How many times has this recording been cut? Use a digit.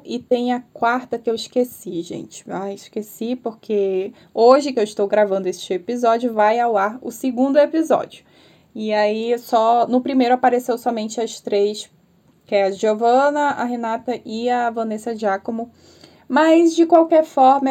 0